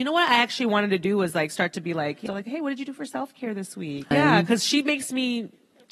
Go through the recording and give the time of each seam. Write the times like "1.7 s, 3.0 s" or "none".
2.3 s, 4.1 s